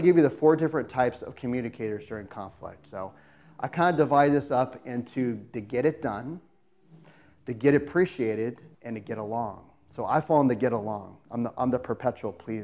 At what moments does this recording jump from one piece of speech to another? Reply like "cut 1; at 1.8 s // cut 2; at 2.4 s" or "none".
cut 1; at 8.7 s